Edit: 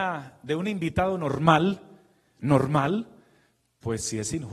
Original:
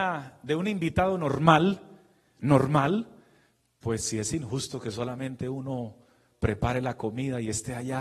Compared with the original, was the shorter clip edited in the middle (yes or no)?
no